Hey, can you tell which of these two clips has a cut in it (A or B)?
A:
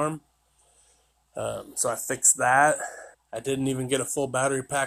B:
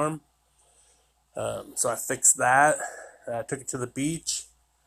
A